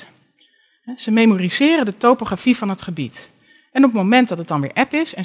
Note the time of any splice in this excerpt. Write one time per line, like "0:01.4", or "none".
none